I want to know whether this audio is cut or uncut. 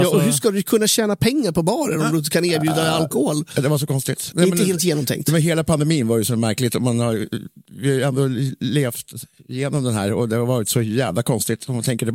cut